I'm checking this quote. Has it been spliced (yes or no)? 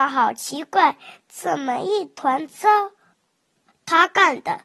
yes